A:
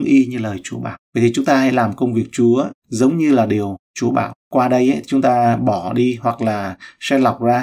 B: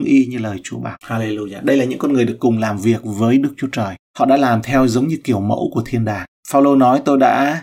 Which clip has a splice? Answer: B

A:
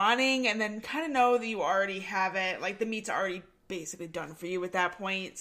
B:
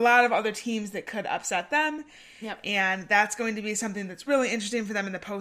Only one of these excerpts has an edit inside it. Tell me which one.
B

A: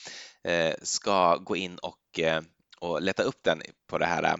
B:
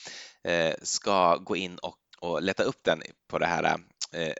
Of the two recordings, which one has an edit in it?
B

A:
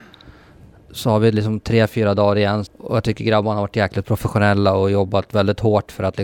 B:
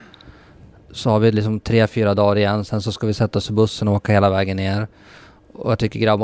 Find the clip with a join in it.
A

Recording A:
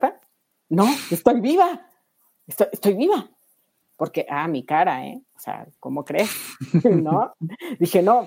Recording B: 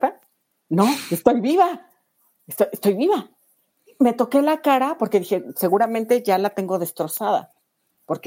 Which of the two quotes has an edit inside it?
A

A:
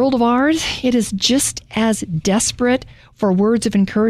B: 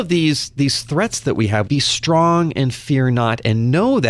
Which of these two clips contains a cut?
B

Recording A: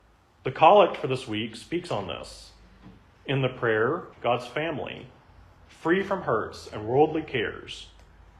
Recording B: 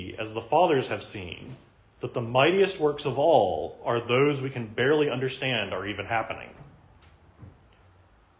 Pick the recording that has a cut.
A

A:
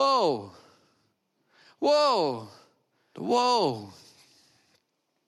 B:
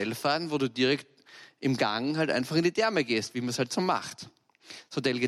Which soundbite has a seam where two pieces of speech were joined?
A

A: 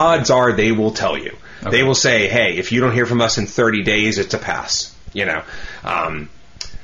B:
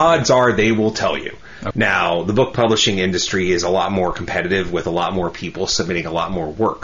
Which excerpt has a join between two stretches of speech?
B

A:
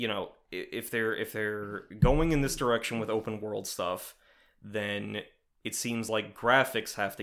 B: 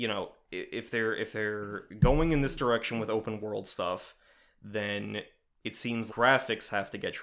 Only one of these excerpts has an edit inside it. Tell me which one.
B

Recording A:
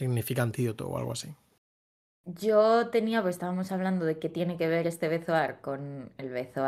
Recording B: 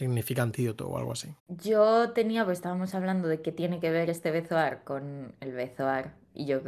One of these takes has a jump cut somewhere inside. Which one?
B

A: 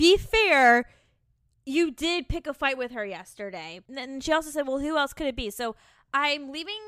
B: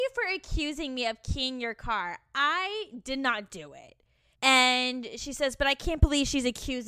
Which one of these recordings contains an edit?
B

